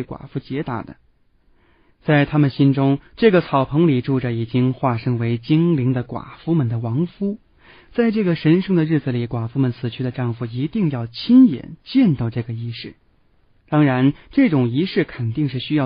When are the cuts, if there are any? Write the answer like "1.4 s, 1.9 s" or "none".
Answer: 13.6 s

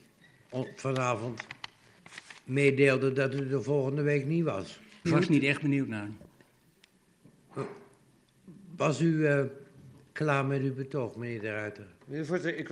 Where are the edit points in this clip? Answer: 5.0 s

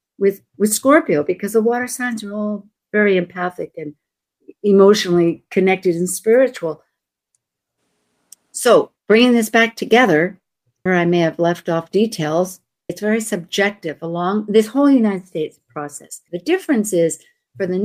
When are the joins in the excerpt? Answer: 10.9 s, 12.9 s, 16.3 s

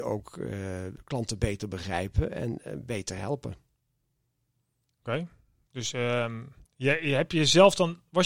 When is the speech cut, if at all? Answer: 6.7 s

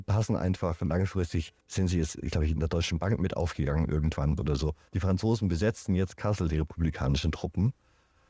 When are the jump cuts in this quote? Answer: 1.6 s, 4.9 s

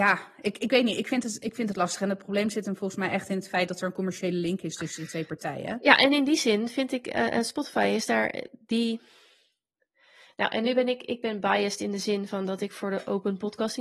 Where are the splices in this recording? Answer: none

